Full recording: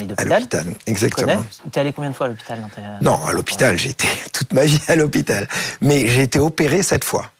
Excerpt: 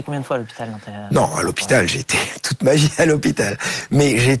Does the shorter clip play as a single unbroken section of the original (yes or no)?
yes